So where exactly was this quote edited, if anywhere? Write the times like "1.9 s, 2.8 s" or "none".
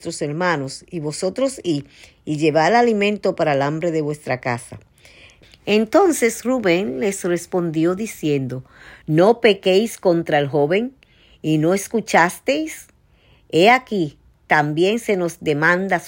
5.4 s, 9.0 s